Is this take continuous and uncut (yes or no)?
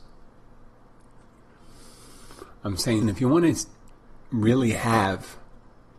no